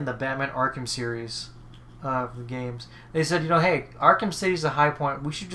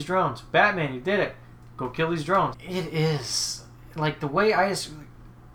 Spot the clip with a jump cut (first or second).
second